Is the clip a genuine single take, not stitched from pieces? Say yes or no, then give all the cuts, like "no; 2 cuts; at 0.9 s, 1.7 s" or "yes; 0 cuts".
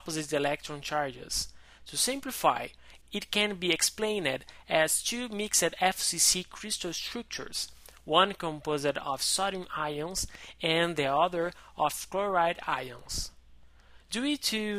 yes; 0 cuts